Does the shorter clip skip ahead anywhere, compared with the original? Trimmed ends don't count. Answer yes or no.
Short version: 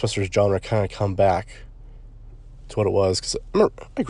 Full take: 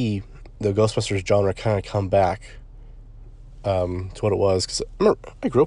yes